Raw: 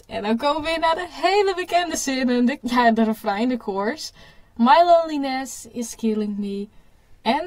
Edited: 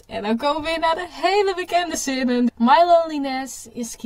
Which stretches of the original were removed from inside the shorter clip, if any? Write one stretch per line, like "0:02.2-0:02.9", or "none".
0:02.5-0:04.5

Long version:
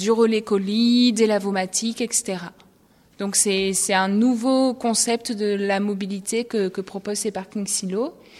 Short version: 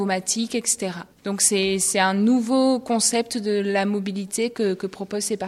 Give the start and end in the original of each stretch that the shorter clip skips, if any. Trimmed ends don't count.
0:02.6-0:03.1

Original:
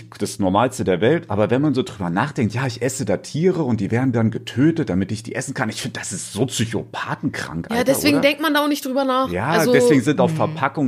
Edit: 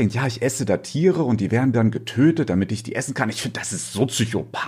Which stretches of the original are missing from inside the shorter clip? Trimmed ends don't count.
none

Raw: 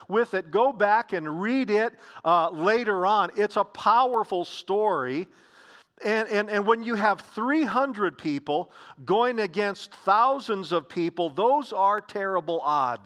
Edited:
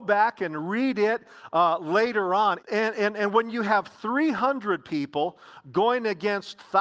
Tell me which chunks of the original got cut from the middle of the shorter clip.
0:03.3-0:05.9

